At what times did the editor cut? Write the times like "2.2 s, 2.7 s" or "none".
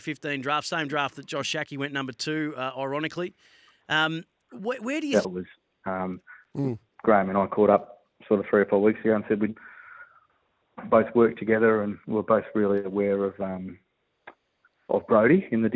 5.2 s